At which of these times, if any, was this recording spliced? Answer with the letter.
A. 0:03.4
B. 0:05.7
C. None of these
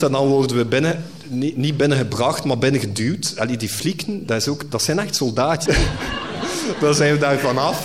B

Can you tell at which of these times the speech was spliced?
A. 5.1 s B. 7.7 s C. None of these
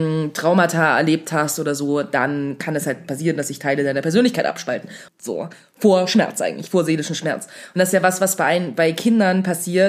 A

